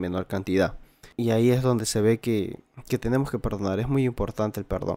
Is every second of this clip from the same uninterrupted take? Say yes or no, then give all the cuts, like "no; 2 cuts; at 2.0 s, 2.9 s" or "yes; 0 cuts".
yes; 0 cuts